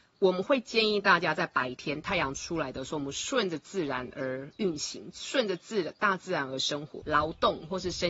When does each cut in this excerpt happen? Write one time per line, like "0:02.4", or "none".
0:07.0